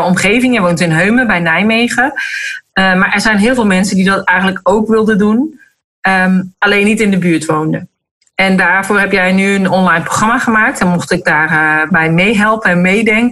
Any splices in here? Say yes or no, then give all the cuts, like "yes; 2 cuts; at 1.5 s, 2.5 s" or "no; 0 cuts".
no; 0 cuts